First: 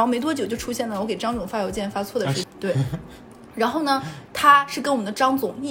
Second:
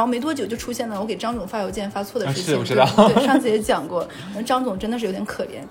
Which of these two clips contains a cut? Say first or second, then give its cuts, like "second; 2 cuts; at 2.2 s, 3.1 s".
first; 1 cut; at 2.4 s